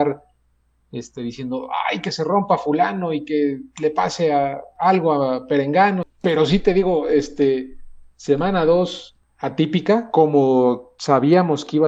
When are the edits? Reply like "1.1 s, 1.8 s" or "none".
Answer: 6.0 s